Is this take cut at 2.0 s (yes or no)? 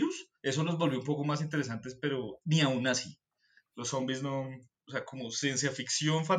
no